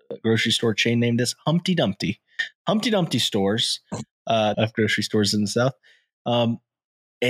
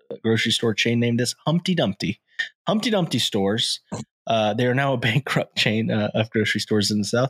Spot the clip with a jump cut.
first; 1 cut; at 4.5 s

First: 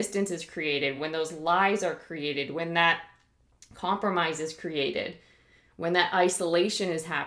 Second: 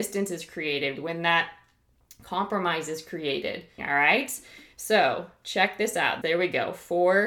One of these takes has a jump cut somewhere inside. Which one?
second; 3 cuts; at 0.9 s, 3.8 s, 6.2 s

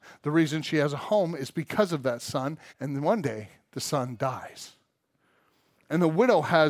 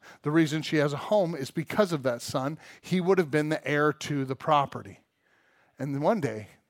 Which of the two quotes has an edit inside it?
first; 1 cut; at 2.7 s

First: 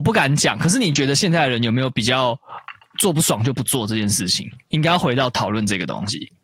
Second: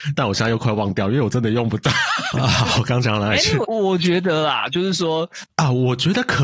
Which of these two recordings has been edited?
second; 3 cuts; at 2.3 s, 3.6 s, 5.5 s

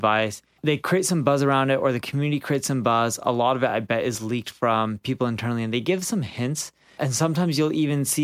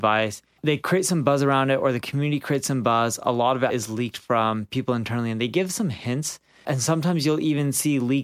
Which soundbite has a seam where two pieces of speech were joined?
second; 1 cut; at 3.7 s

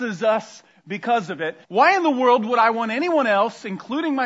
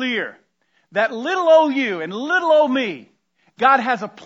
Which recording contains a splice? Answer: first; 1 cut; at 1.6 s

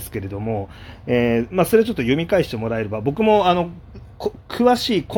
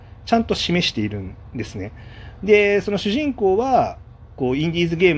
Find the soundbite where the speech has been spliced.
second; 1 cut; at 2.4 s

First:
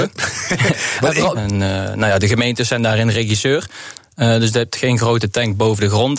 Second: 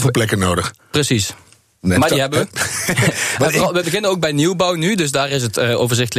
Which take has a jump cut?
first; 2 cuts; at 1.3 s, 4.0 s

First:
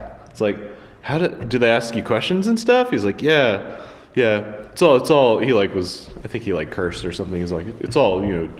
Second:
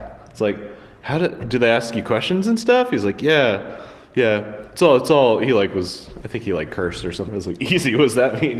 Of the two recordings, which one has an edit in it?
second; 1 cut; at 7.3 s

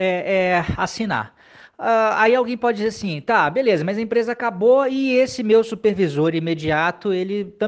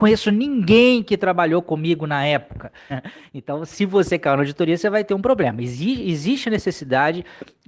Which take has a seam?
second; 1 cut; at 2.9 s

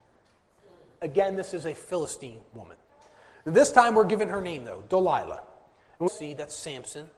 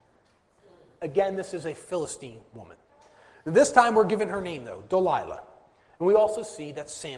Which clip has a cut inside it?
first; 1 cut; at 6.1 s

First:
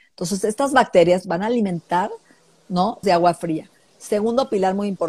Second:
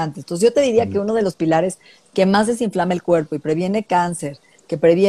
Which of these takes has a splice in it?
first; 1 cut; at 3.0 s

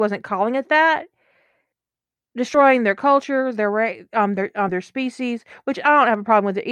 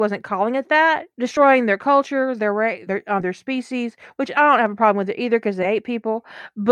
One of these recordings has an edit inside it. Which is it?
second; 2 cuts; at 1.1 s, 2.9 s

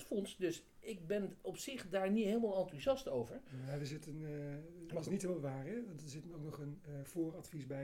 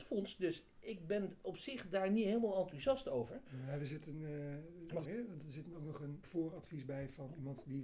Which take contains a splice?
second; 2 cuts; at 5.0 s, 6.2 s

